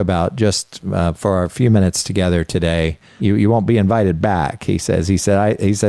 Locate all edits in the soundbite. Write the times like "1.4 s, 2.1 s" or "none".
3.2 s

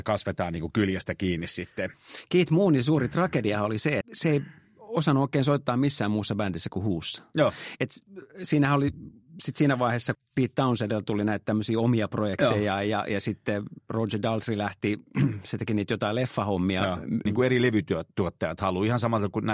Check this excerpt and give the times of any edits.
4.0 s, 10.1 s, 17.3 s

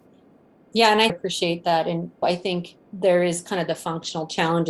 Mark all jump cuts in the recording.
1.1 s, 2.8 s

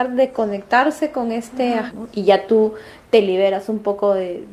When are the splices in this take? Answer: 1.9 s

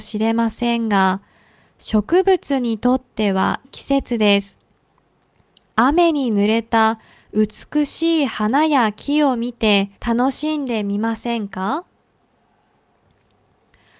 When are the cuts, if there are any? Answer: 3.6 s, 10.0 s

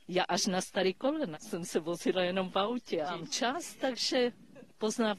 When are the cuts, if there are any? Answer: 1.3 s, 3.0 s

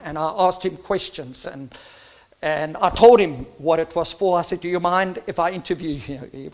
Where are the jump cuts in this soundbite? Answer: none

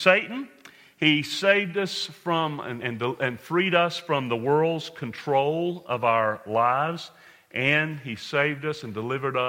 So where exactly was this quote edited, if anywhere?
none

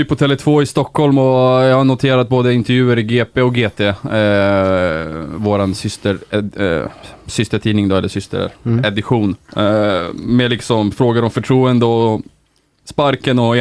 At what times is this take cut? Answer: none

